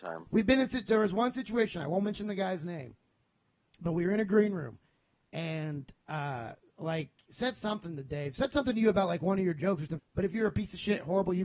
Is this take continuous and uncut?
no; 2 cuts; at 6.6 s, 10.0 s

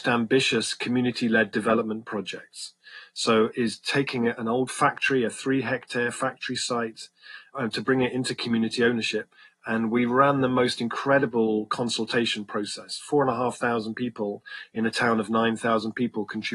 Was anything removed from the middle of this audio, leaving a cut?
no; 0 cuts

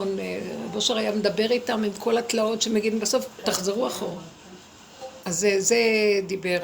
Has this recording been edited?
yes; 2 cuts; at 3.4 s, 5.2 s

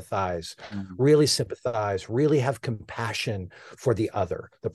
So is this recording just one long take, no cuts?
yes; 0 cuts

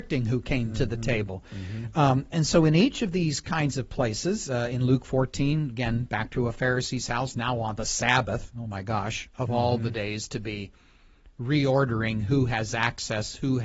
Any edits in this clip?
no; 0 cuts

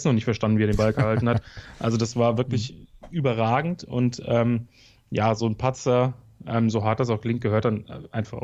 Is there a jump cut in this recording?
no; 0 cuts

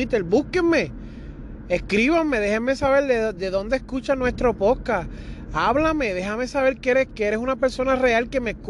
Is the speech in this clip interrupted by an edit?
yes; 2 cuts; at 3.3 s, 7.1 s

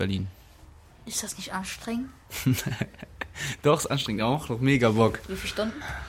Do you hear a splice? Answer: no; 0 cuts

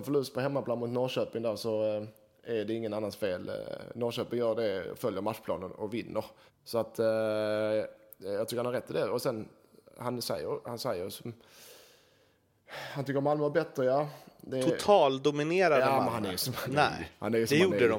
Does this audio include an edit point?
yes; 1 cut; at 6.5 s

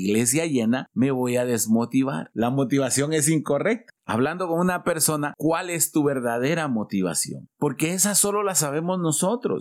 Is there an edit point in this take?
yes; 3 cuts; at 2.3 s, 4.0 s, 5.3 s

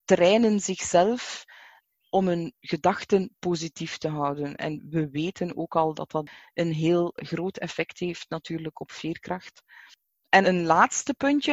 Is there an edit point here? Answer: yes; 1 cut; at 10.4 s

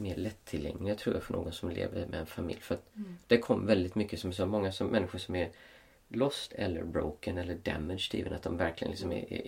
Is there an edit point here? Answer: no; 0 cuts

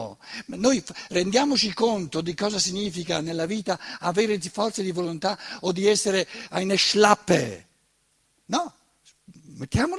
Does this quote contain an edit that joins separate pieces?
yes; 1 cut; at 8.4 s

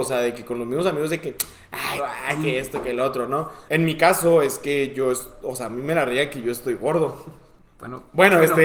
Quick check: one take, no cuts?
no; 2 cuts; at 2.0 s, 3.7 s

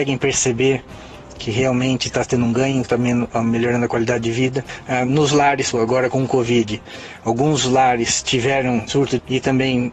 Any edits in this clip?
yes; 2 cuts; at 5.7 s, 8.9 s

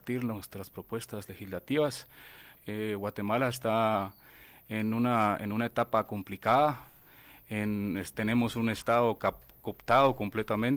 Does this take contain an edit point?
yes; 1 cut; at 2.6 s

